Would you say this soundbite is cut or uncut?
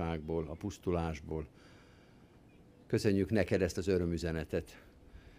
uncut